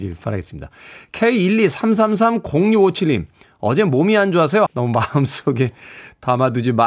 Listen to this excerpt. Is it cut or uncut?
cut